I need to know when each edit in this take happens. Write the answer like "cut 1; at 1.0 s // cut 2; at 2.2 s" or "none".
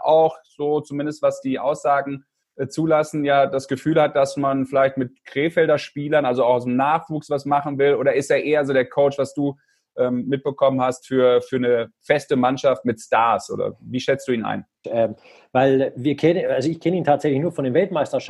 cut 1; at 14.8 s